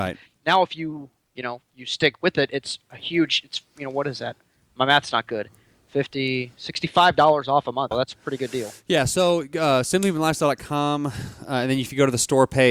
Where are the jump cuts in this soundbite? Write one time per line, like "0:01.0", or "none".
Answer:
0:07.9